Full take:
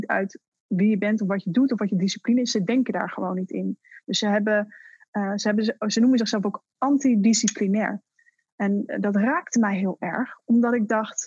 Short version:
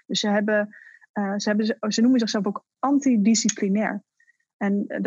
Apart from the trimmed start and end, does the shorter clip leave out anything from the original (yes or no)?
no